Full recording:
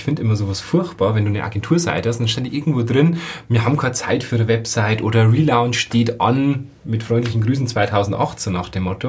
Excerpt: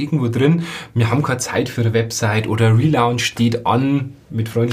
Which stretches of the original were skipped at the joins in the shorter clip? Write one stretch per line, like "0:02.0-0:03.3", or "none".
none